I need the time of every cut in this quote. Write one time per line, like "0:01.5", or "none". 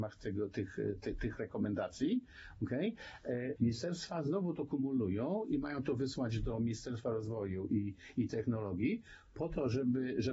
0:03.6

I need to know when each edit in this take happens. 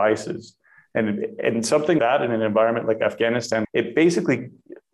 0:02.0
0:03.6

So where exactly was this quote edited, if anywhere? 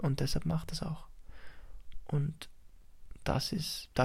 none

